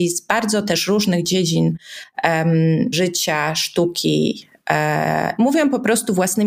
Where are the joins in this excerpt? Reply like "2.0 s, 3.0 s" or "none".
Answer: 2.9 s, 5.4 s